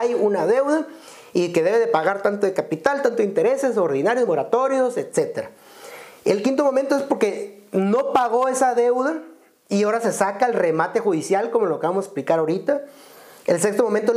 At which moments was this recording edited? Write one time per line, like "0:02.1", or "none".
none